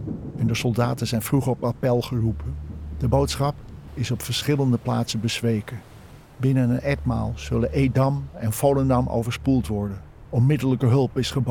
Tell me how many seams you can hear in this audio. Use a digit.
1